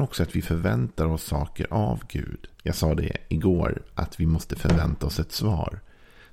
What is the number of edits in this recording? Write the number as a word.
one